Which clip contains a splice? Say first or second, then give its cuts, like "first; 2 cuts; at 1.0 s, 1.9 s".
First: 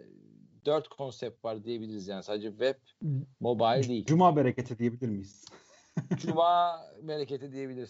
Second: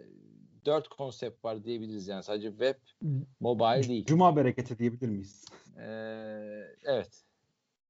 second; 1 cut; at 5.7 s